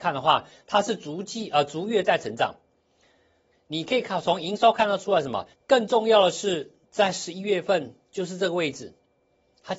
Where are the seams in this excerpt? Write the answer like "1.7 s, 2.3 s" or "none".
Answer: 3.5 s, 5.5 s